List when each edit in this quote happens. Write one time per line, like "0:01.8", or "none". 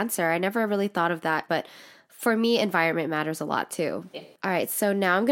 0:01.5
0:04.1

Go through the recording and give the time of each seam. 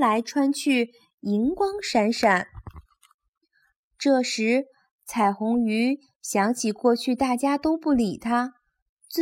none

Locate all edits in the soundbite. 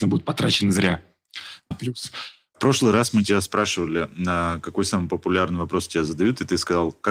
0:01.7

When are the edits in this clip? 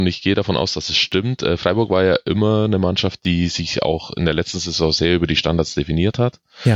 none

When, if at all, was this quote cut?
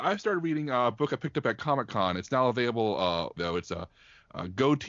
0:03.4

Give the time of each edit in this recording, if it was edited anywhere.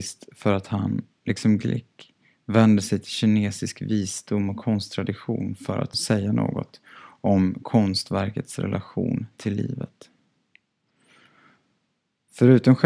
none

